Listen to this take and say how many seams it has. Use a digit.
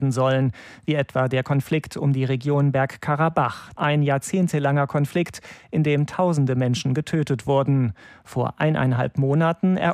0